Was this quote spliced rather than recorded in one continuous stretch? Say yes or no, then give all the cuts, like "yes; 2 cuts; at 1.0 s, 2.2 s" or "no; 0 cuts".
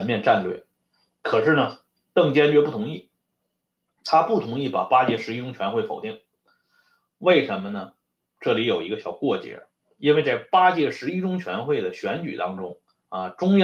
no; 0 cuts